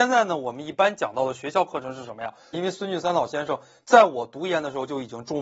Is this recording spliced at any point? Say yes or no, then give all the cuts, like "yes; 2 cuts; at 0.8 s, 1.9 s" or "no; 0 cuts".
yes; 1 cut; at 2.5 s